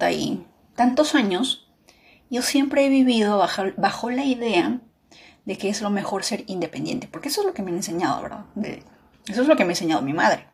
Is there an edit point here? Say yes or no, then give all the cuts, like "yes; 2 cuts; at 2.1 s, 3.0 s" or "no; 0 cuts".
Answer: no; 0 cuts